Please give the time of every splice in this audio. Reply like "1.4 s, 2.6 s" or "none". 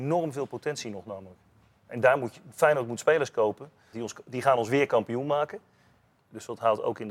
3.9 s, 6.2 s